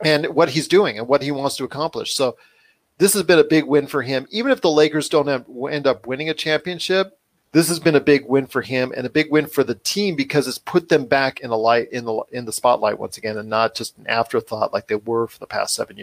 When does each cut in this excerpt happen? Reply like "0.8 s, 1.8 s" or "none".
7.4 s, 11.9 s